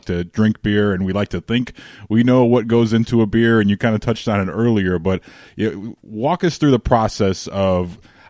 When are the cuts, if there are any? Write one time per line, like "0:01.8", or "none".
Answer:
none

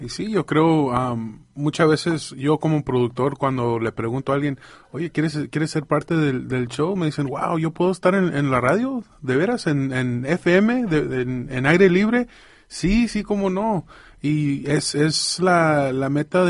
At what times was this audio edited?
none

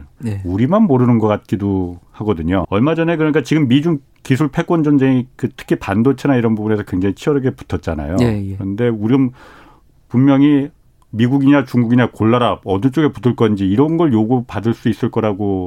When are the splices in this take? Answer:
0:02.6

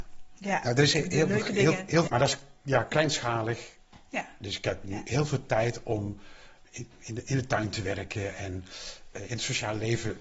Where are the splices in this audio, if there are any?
0:02.1

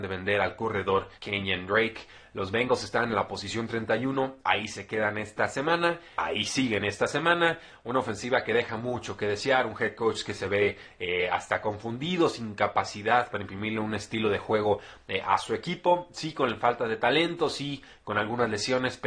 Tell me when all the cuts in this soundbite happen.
0:01.1
0:06.2

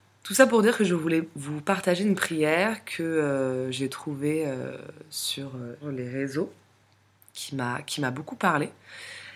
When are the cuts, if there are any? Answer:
0:05.8

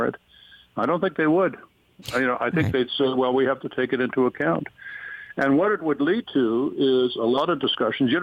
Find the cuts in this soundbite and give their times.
none

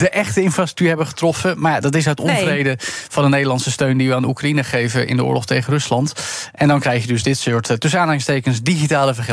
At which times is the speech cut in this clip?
none

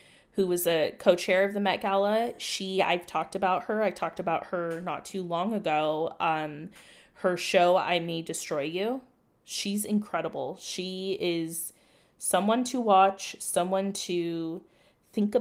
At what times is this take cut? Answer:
none

